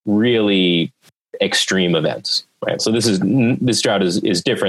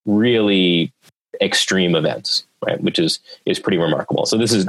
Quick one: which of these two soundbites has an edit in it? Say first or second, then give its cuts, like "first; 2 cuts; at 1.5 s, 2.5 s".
first; 1 cut; at 2.8 s